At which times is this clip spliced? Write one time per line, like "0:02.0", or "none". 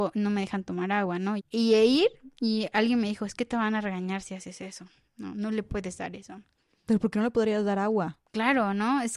0:01.4